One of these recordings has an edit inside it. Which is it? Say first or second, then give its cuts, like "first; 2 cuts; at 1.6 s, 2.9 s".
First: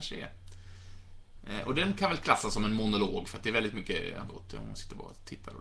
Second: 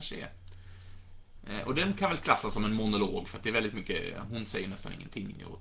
first; 1 cut; at 4.3 s